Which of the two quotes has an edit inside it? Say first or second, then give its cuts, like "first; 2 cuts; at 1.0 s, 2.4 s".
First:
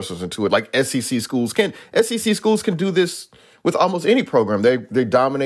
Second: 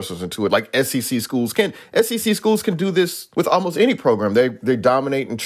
second; 1 cut; at 3.3 s